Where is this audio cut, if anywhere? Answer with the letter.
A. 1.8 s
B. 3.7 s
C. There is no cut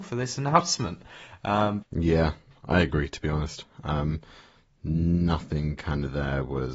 A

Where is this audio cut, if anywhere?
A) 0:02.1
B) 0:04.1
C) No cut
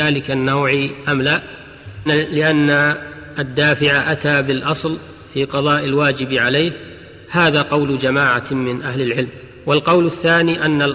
A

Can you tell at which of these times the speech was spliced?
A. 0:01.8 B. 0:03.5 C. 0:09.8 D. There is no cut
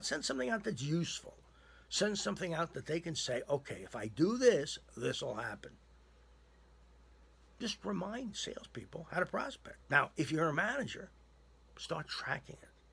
C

